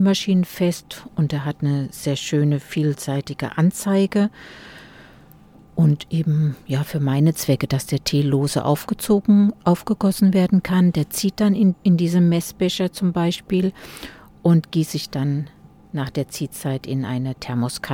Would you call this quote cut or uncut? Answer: cut